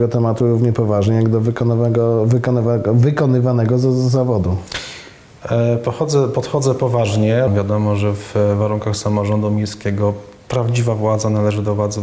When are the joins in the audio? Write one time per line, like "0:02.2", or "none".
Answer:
0:07.5